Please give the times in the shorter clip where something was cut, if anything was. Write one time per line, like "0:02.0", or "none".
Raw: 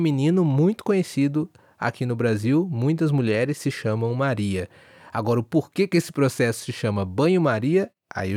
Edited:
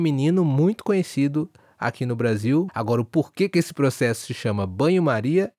0:02.7